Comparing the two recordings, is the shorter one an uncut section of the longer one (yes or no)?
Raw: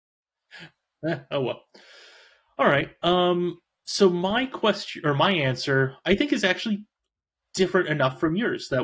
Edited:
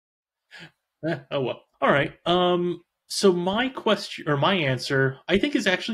no